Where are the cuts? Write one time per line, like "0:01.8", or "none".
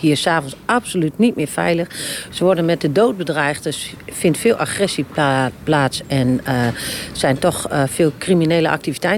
none